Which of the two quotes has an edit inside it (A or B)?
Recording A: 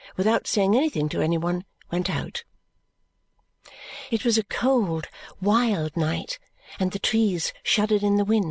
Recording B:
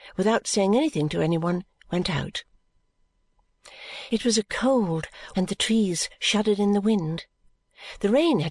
B